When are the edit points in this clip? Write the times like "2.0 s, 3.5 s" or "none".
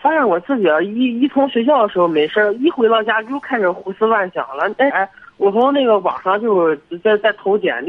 4.9 s